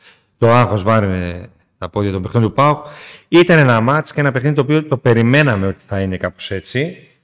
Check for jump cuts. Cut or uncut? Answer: uncut